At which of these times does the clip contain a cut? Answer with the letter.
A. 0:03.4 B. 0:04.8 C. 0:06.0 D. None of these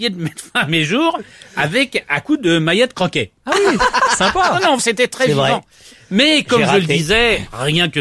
B